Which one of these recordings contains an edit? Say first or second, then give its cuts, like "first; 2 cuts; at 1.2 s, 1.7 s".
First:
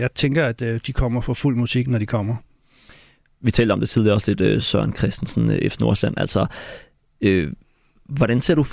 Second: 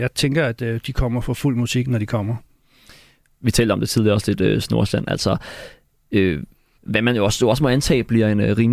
second; 2 cuts; at 4.6 s, 6.8 s